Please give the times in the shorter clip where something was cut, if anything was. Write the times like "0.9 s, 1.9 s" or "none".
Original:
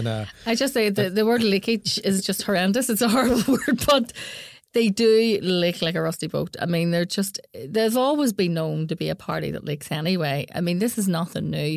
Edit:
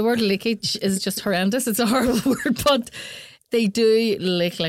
none